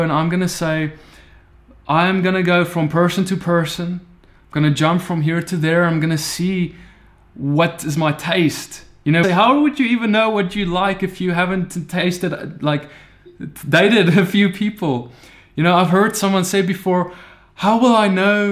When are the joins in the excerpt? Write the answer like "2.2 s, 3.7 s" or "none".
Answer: 9.2 s

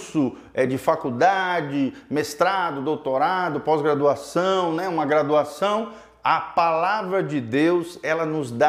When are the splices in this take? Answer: none

